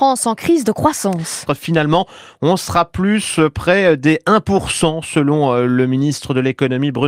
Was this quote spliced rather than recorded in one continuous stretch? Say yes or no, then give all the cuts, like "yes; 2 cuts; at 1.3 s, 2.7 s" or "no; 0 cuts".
yes; 1 cut; at 1.5 s